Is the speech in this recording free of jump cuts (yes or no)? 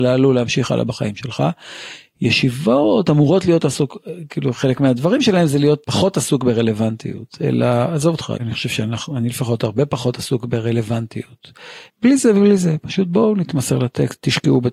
no